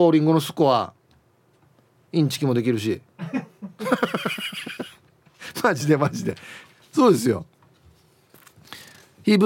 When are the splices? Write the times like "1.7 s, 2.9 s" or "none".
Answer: none